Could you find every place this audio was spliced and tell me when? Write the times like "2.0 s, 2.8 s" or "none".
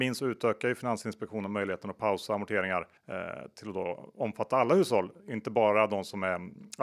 3.0 s